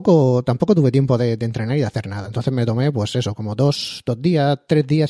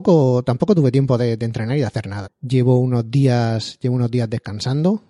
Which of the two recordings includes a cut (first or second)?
second